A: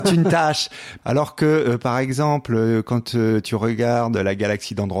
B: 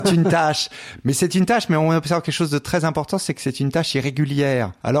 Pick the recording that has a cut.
A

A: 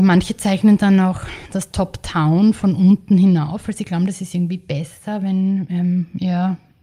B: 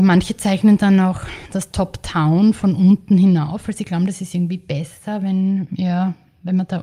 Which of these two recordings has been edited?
B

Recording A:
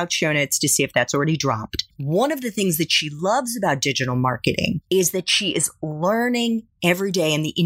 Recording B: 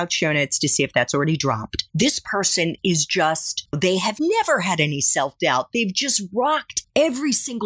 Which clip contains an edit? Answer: B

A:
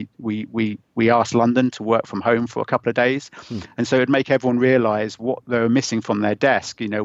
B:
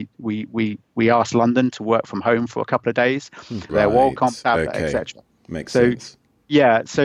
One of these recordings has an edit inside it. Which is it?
B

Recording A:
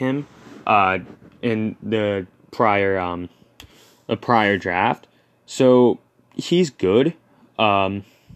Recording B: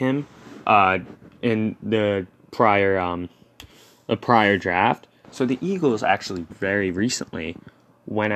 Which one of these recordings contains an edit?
B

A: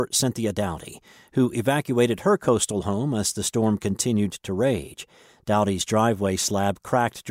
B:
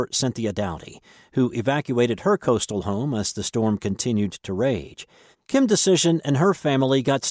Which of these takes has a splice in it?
B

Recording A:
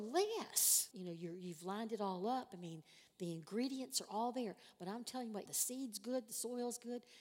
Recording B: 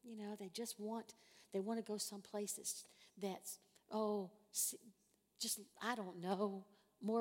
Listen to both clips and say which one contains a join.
A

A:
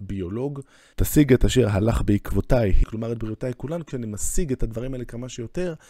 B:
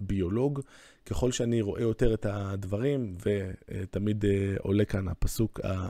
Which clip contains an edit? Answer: A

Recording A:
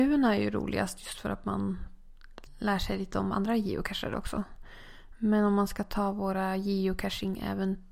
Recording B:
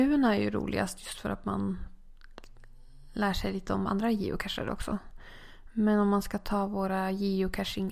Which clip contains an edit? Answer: A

